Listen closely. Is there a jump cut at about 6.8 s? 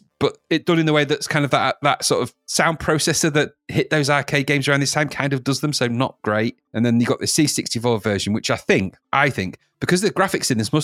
no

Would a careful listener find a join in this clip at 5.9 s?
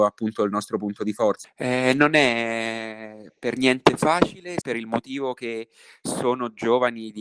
no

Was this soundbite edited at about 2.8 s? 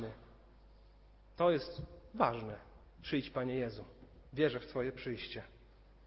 yes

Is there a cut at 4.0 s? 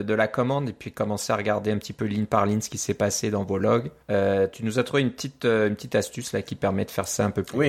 yes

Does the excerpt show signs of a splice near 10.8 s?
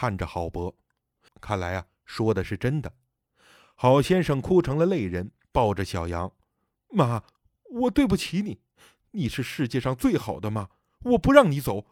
no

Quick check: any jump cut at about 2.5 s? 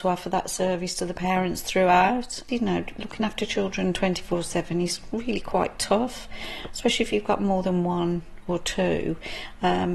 yes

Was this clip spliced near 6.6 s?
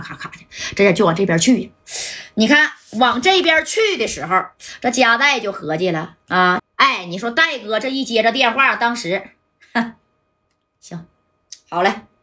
yes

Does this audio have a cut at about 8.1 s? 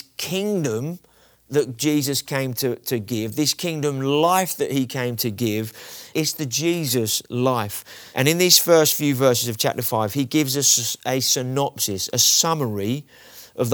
no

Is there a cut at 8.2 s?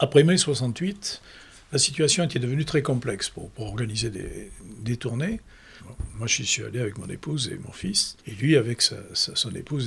yes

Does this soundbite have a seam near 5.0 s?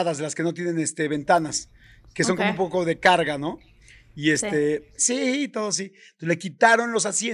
yes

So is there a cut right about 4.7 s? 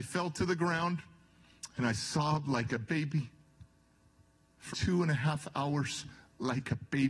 yes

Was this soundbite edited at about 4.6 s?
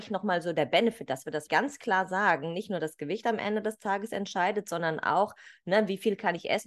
no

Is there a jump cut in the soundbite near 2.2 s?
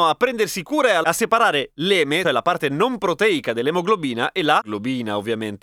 yes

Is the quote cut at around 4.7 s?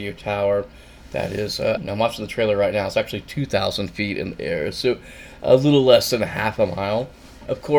no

